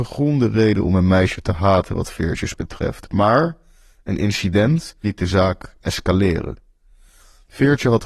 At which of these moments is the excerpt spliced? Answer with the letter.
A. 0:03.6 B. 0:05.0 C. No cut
B